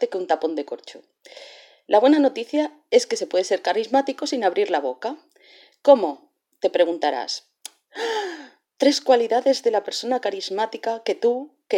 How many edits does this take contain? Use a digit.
1